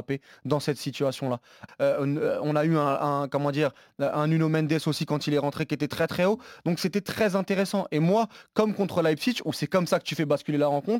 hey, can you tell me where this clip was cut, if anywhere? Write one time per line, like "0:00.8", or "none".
0:01.7